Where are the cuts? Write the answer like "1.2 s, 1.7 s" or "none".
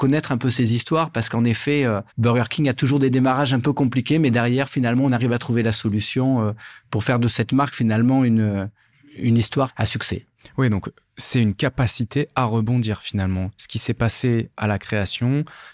2.1 s